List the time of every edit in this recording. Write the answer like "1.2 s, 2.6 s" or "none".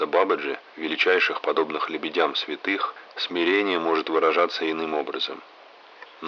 3.1 s

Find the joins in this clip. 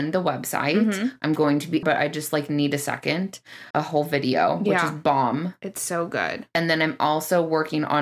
1.8 s, 3.7 s

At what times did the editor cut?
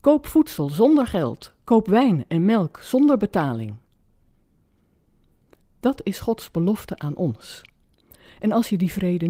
5.6 s

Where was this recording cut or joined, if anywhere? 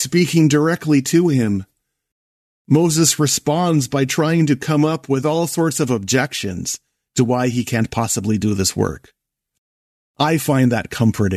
none

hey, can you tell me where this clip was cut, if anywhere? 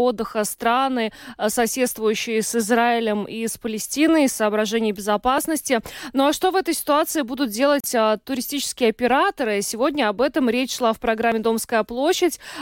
none

